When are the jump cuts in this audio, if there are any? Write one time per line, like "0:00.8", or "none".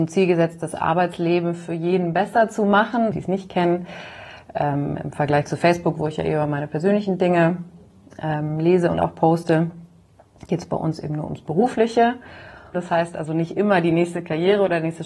0:03.1
0:12.7